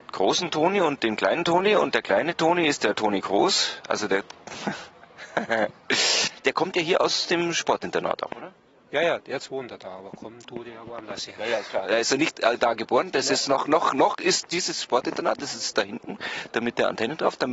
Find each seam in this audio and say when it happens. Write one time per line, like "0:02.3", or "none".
none

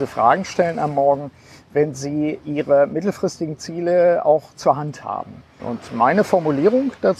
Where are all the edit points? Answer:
0:05.6

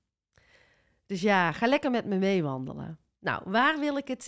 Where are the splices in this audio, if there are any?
none

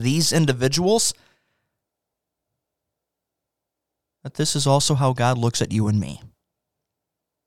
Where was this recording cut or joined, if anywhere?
none

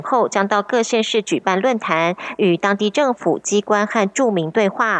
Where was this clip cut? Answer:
none

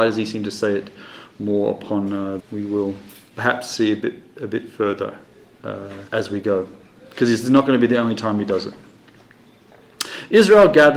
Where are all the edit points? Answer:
0:02.4
0:06.1

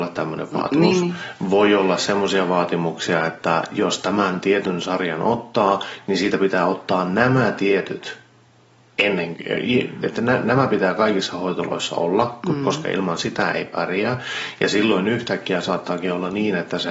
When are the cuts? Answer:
none

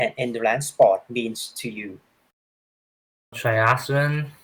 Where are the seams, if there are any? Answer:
0:03.3

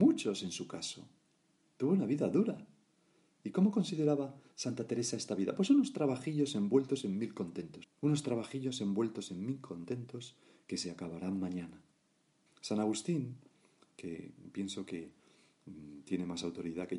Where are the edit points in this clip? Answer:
0:07.8
0:12.5

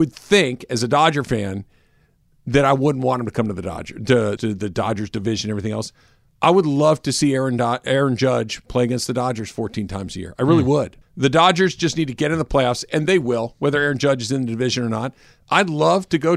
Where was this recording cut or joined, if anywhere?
0:04.4
0:11.0

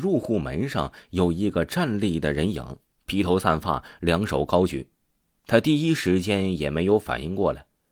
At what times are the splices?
none

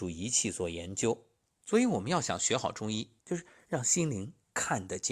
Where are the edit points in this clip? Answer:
0:01.5
0:03.2

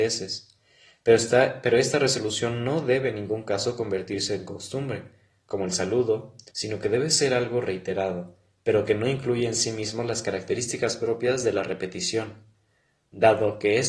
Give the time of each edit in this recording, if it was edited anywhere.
0:06.5

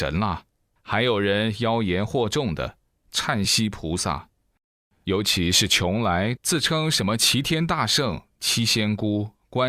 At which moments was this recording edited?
0:03.4
0:06.4

